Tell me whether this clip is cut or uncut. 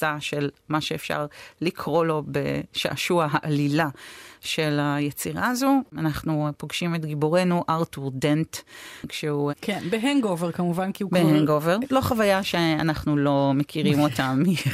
cut